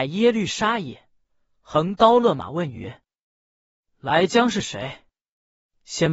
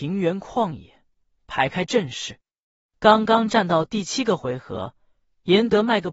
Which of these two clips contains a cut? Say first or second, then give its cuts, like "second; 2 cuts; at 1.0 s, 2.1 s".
second; 1 cut; at 2.8 s